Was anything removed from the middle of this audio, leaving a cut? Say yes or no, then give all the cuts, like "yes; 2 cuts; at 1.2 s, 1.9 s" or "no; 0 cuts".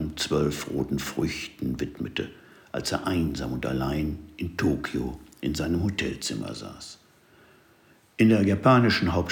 no; 0 cuts